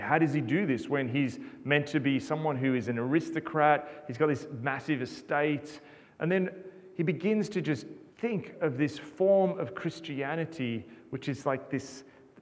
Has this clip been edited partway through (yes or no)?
yes